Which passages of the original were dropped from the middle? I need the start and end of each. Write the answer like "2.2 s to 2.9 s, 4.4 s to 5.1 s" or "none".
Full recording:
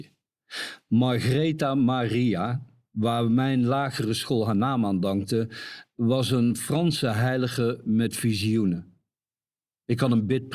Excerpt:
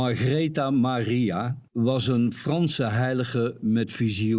2.7 s to 5.9 s